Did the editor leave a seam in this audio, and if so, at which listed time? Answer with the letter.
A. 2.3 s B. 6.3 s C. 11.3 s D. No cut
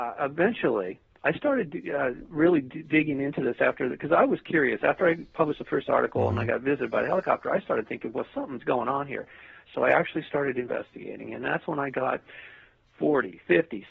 D